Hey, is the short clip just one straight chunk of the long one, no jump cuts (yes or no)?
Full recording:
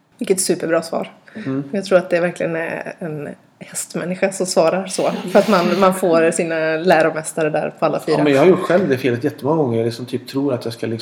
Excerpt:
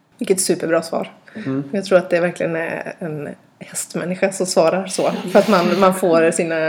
yes